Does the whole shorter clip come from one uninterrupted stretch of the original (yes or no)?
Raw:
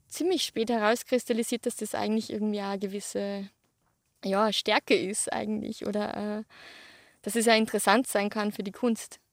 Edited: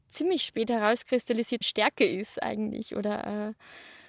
no